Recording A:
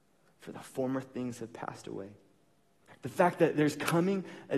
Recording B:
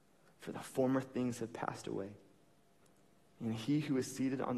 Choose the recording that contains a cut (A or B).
A